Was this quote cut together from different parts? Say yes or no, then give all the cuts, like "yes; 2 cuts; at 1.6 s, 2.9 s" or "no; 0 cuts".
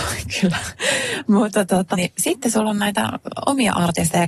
yes; 1 cut; at 1.9 s